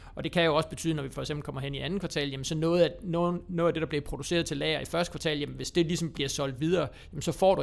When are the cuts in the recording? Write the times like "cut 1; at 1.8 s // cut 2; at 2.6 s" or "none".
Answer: none